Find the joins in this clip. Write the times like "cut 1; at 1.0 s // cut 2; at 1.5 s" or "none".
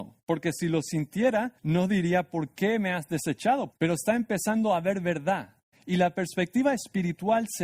cut 1; at 1.6 s // cut 2; at 3.7 s